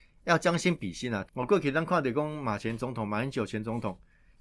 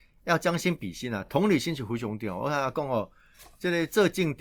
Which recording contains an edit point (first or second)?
first